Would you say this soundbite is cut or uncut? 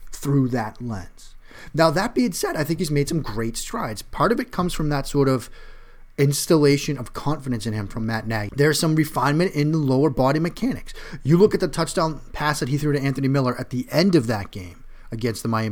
cut